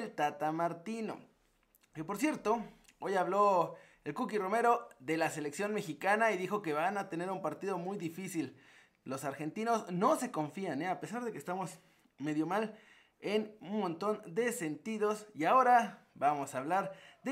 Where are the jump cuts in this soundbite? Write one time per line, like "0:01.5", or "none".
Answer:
none